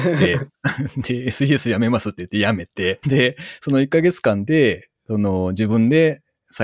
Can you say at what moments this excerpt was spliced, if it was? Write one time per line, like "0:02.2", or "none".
0:03.0